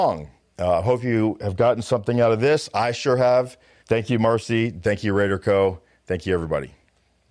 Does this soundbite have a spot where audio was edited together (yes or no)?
yes